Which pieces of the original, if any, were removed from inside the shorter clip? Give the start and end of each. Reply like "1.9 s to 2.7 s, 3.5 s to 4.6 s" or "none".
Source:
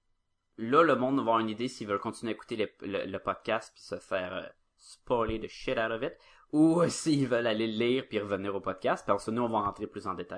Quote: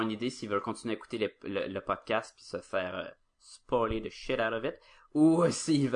none